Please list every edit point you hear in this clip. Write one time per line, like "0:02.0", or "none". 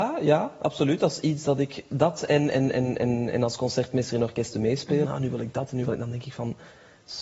0:05.0